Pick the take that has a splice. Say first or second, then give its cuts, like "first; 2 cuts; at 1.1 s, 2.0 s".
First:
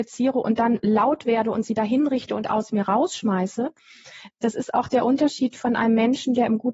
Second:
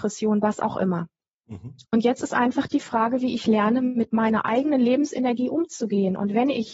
second; 1 cut; at 1.8 s